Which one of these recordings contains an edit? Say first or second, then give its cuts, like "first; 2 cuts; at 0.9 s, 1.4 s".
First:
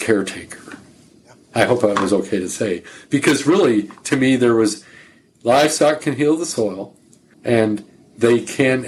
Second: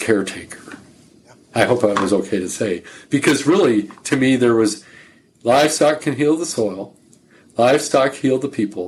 first; 1 cut; at 7.3 s